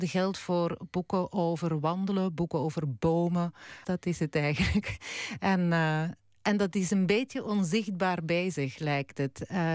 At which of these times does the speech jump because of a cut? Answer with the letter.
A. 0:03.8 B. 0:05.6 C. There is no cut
A